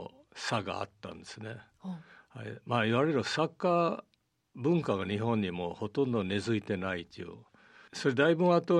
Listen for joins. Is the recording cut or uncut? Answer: cut